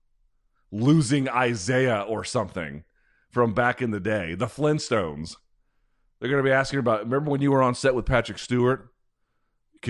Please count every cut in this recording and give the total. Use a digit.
0